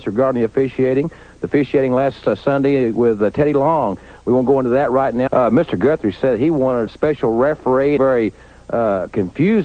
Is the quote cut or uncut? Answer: cut